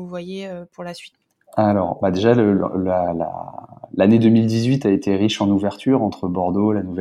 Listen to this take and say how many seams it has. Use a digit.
0